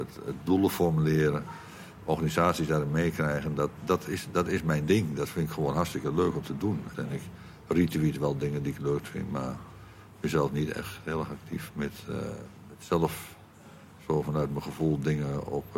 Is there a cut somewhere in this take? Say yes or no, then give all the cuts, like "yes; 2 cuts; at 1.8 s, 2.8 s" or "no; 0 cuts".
yes; 1 cut; at 6.9 s